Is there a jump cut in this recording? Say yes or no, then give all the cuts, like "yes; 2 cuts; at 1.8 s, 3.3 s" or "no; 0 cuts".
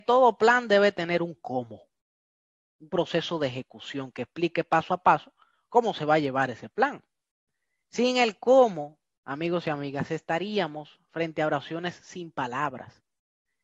no; 0 cuts